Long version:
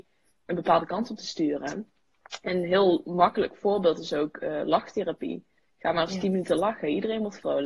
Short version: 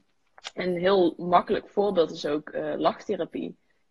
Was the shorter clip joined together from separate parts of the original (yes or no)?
no